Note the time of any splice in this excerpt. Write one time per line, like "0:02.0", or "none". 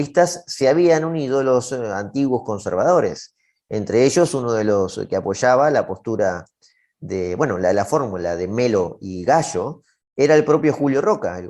none